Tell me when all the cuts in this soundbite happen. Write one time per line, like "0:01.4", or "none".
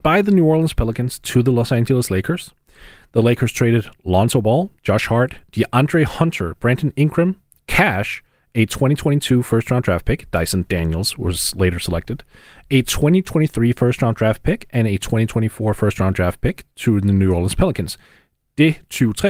none